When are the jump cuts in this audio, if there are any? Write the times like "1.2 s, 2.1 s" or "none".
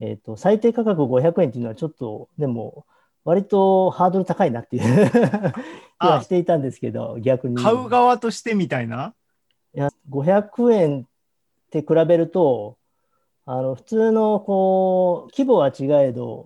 9.9 s, 15.3 s